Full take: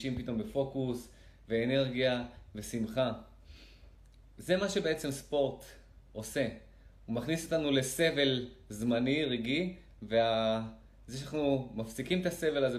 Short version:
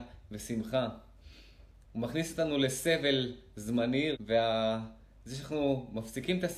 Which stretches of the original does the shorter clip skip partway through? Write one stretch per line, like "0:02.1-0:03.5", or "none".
0:04.1-0:07.0
0:09.3-0:10.0